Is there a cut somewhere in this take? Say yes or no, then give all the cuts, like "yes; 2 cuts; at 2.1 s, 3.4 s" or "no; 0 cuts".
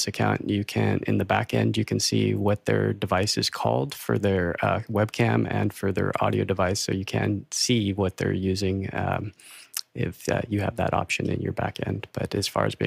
no; 0 cuts